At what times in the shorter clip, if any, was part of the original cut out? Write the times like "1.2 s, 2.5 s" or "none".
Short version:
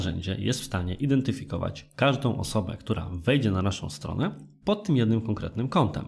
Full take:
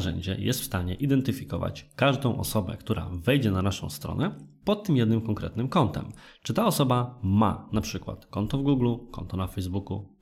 none